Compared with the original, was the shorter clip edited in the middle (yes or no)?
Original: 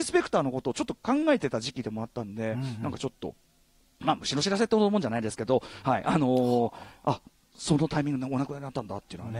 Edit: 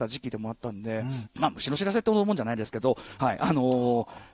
yes